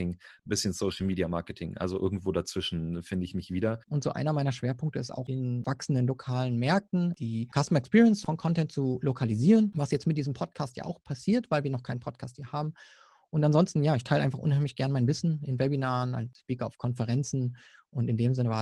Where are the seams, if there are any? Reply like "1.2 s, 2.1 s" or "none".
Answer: 3.8 s